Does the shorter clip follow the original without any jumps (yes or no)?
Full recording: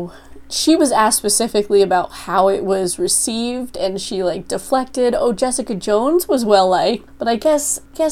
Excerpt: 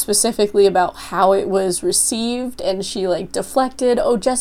yes